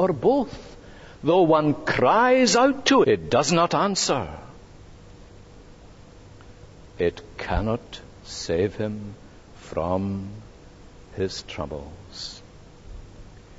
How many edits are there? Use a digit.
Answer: 2